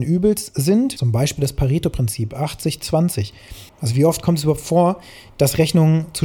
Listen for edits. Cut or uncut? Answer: cut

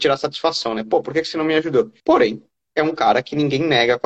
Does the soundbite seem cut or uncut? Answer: cut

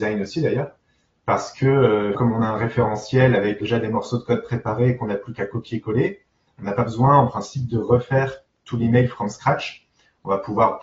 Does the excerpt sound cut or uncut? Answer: cut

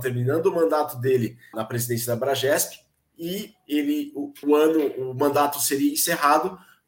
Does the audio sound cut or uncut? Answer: cut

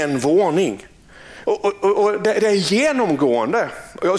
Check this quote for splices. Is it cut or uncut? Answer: cut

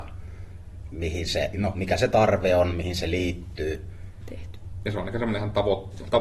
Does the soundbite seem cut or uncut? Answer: cut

